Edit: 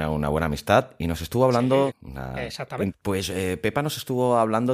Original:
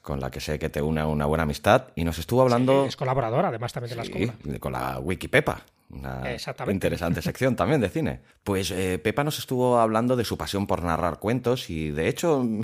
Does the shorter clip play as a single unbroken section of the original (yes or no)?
no